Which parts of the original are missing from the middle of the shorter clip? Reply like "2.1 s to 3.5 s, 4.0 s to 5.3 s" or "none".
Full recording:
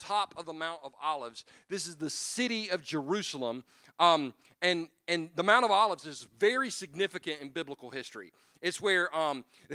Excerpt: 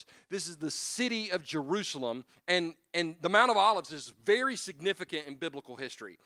3.7 s to 4.5 s